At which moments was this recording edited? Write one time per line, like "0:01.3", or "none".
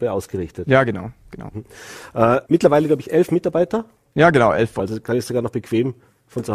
0:02.4
0:04.8